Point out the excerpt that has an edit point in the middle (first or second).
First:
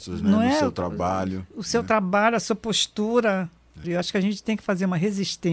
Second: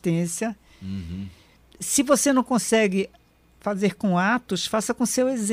first